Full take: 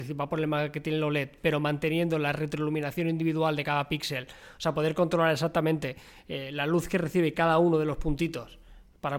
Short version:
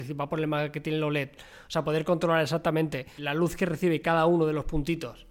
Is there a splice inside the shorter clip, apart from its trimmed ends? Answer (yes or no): yes